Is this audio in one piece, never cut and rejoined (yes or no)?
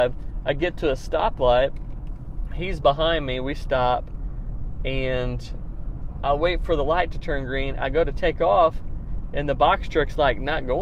yes